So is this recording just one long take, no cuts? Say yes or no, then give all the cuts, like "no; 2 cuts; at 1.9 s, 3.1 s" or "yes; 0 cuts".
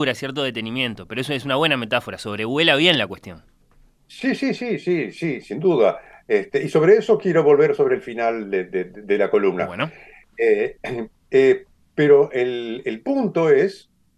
yes; 0 cuts